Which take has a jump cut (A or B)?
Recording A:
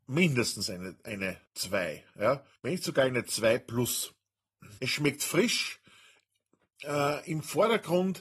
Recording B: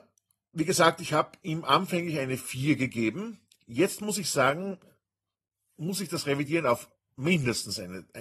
A